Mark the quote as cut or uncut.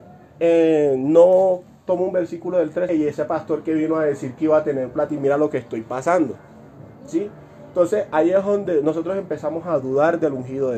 cut